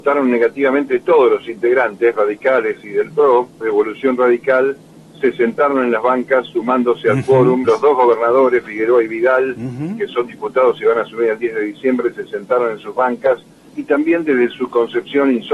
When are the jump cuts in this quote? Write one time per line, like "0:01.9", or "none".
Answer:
0:03.6
0:07.6
0:13.7